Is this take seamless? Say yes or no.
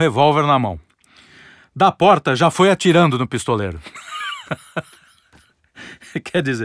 yes